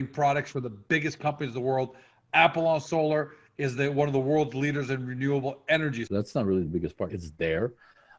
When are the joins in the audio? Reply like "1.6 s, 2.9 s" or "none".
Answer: 6.1 s, 7.1 s